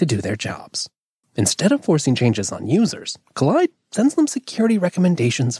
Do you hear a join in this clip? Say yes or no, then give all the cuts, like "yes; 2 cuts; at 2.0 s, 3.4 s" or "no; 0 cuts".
yes; 1 cut; at 1.2 s